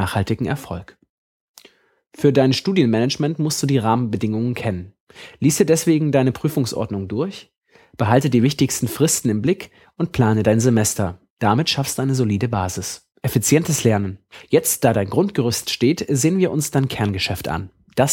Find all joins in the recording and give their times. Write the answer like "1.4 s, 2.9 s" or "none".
13.1 s

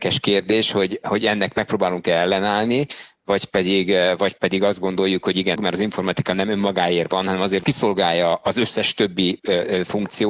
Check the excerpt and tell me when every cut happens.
5.6 s, 7.6 s

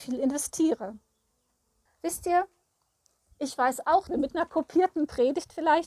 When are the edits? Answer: 1.9 s, 4.1 s

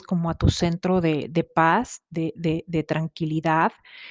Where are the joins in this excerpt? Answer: none

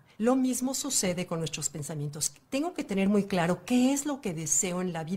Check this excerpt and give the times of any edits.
none

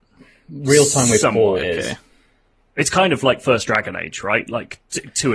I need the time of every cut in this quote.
1.6 s

